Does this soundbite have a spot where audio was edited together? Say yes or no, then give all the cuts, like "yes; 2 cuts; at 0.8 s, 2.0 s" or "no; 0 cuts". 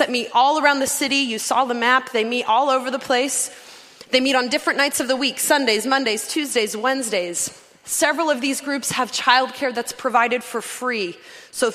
no; 0 cuts